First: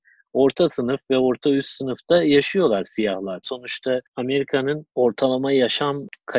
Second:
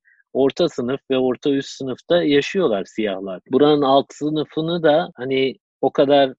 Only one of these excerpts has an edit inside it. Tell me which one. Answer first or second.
first